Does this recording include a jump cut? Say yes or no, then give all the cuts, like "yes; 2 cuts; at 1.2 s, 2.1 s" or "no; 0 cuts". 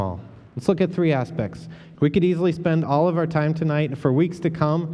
yes; 1 cut; at 1.9 s